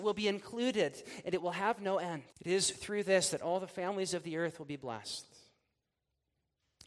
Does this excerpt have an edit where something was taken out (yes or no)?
yes